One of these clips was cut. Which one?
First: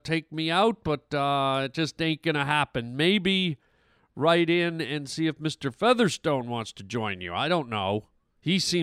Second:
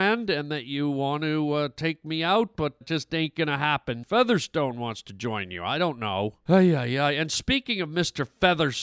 second; 3 cuts; at 2.8 s, 4.0 s, 6.5 s

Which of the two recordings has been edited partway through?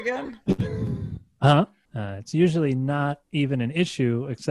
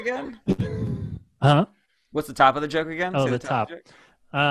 first; 1 cut; at 1.8 s

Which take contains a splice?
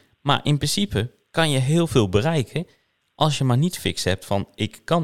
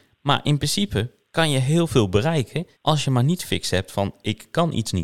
second; 1 cut; at 2.8 s

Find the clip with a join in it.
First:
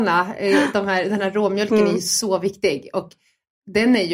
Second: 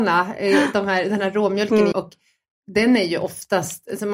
second; 1 cut; at 1.9 s

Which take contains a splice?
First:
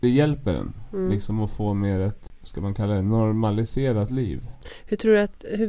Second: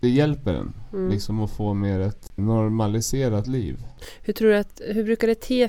second; 1 cut; at 2.4 s

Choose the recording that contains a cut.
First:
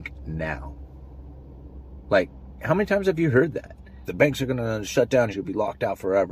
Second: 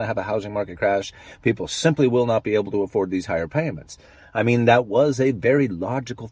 first; 2 cuts; at 4.0 s, 5.3 s

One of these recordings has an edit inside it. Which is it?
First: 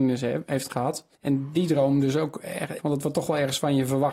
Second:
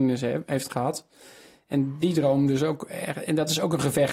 first; 2 cuts; at 1.2 s, 2.8 s

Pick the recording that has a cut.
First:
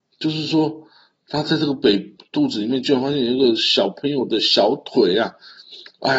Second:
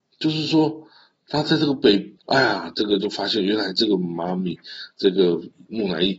second; 1 cut; at 2.2 s

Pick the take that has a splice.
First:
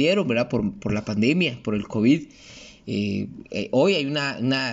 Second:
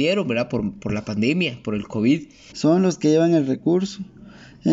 second; 1 cut; at 2.5 s

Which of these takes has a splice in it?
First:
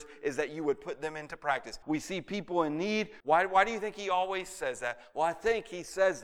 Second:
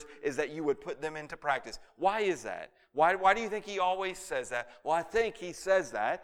first; 2 cuts; at 1.8 s, 3.2 s

